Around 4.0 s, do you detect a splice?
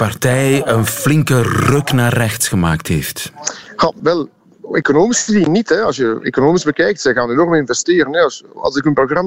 yes; 1 cut; at 4.0 s

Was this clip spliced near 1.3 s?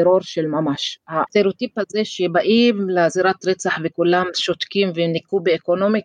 yes; 1 cut; at 1.3 s

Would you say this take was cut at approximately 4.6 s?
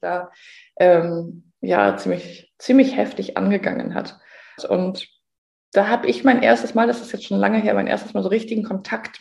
yes; 1 cut; at 4.6 s

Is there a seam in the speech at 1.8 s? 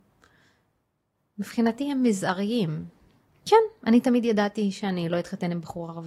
no; 1 cut; at 3.3 s

